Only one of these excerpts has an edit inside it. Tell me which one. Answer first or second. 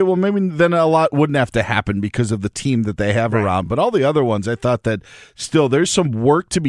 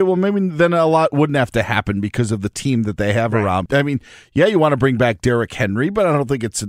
second